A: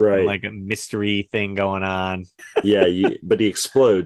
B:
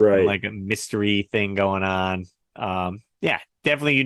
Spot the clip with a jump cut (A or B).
A